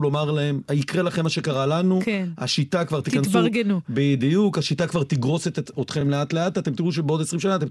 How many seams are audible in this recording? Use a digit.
0